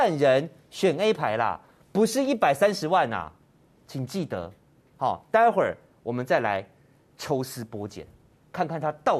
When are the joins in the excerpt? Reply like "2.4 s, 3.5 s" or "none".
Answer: none